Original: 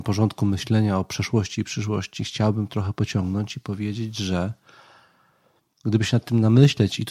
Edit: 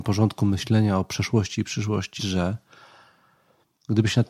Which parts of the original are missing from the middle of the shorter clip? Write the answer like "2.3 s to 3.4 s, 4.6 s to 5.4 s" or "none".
2.2 s to 4.1 s